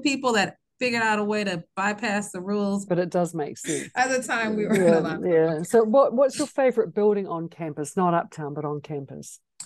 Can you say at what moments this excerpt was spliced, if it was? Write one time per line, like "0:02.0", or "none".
0:02.9